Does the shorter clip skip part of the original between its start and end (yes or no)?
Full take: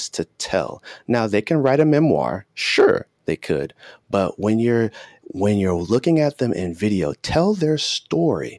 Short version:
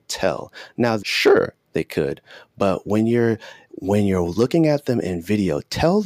yes